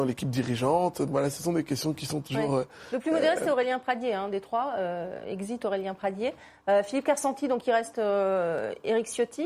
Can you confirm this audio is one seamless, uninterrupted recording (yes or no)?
yes